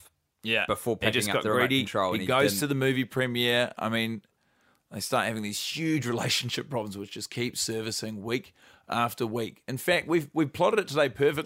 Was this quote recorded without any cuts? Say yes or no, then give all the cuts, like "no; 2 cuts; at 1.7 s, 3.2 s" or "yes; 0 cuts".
yes; 0 cuts